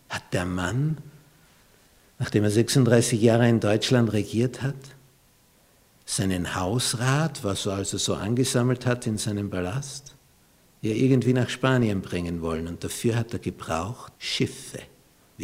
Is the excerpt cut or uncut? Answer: cut